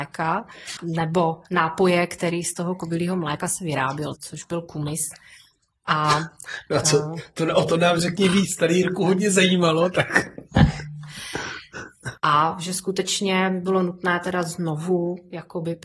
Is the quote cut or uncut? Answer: cut